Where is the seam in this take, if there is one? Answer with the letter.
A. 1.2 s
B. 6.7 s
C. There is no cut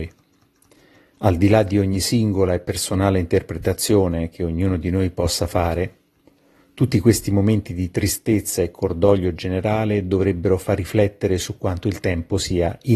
A